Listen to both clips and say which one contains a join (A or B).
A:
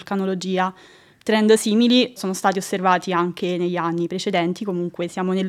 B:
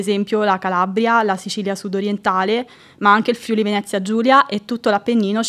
A